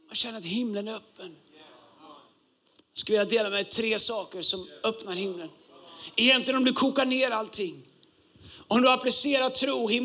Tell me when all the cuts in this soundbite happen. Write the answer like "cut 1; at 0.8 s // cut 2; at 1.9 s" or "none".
none